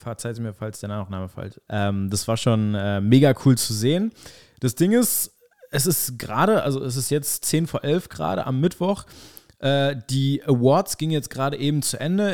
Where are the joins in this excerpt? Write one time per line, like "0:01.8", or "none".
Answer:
0:01.7